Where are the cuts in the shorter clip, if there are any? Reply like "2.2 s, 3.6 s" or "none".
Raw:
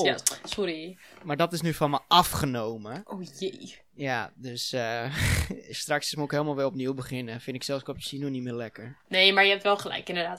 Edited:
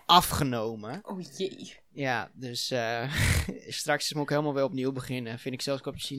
none